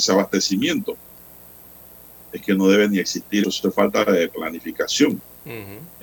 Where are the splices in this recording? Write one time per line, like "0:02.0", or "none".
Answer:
0:03.4